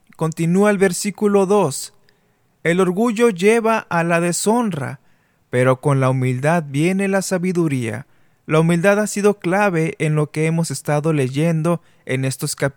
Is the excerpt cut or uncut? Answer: uncut